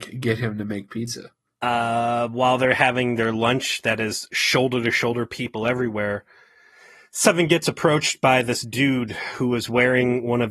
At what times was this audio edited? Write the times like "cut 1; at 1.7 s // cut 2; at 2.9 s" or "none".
none